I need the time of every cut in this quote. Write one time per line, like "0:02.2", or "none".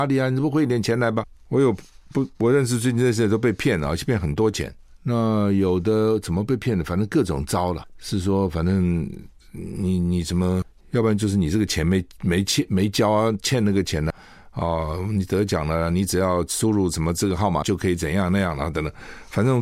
0:14.1
0:17.6